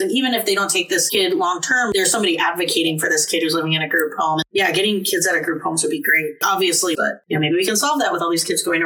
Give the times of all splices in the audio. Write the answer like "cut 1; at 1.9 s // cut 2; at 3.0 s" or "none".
cut 1; at 6.9 s

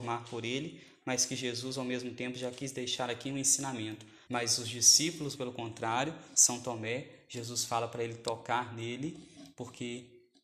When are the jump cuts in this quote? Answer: cut 1; at 4.3 s // cut 2; at 5.3 s

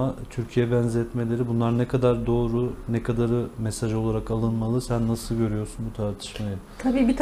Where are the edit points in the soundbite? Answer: none

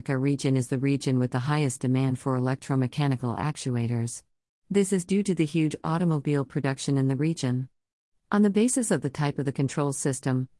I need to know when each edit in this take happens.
cut 1; at 4.6 s // cut 2; at 8.2 s

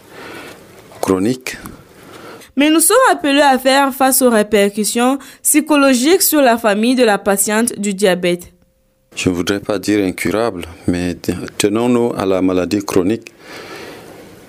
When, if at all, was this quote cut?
cut 1; at 2.4 s // cut 2; at 9.1 s

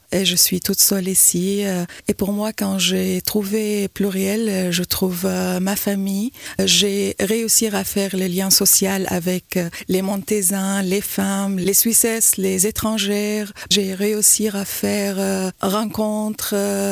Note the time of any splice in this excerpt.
none

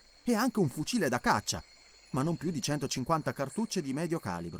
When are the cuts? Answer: none

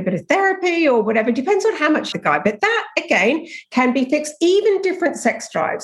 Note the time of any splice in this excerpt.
cut 1; at 2.1 s

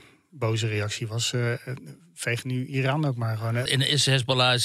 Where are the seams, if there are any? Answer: cut 1; at 3.7 s

